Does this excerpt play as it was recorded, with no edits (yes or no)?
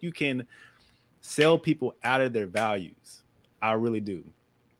yes